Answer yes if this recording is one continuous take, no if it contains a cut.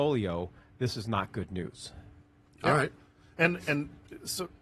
yes